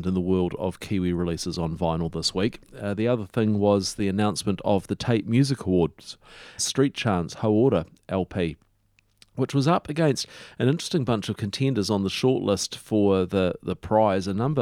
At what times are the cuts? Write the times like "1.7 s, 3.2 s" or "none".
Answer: 6.6 s